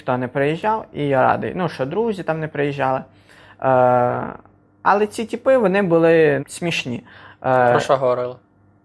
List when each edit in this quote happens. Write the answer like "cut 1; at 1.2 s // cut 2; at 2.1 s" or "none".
cut 1; at 6.4 s